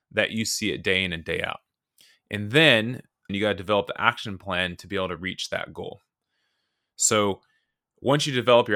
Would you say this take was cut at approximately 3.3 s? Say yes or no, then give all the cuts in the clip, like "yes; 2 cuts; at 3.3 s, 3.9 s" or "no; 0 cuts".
yes; 1 cut; at 3.3 s